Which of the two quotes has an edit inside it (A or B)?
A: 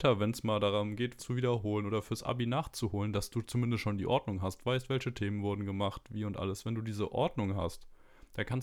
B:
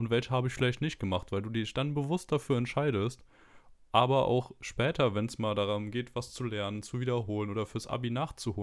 A